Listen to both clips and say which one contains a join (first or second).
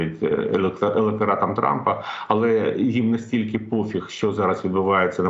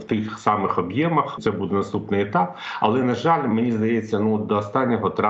second